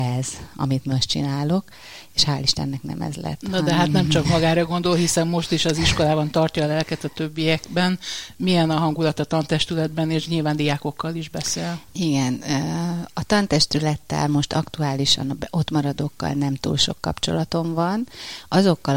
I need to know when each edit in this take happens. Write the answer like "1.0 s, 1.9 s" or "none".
none

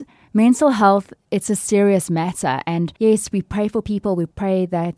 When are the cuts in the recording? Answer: 3.0 s

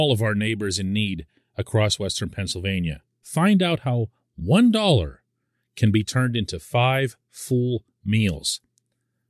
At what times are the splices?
3.2 s

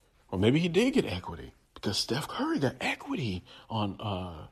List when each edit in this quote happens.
1.6 s

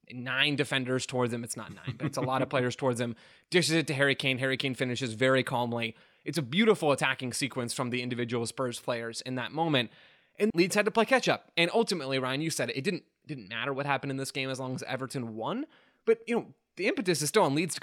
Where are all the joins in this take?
10.5 s

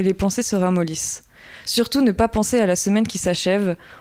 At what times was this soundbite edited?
none

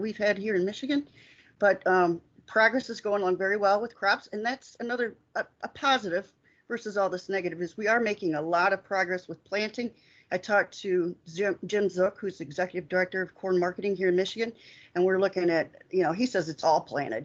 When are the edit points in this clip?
none

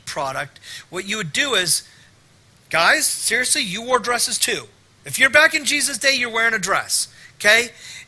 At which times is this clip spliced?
none

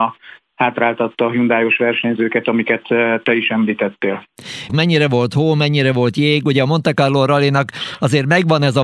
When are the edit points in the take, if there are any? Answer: 4.7 s

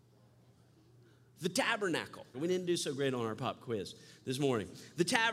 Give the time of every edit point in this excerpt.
2.3 s

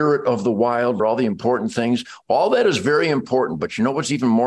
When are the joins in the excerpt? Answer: 1.0 s

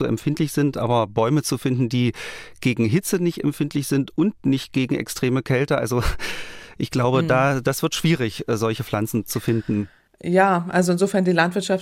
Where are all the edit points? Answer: none

